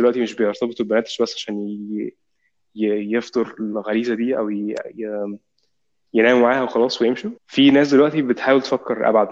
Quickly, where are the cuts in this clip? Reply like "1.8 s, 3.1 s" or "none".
6.1 s, 7.4 s